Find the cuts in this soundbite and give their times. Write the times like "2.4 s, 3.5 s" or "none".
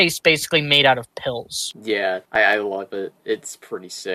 1.7 s